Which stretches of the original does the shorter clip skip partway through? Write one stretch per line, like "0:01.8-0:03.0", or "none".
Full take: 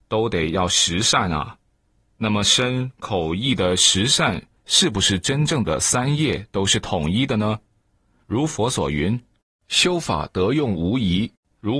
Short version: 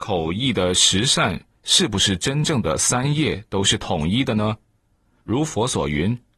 none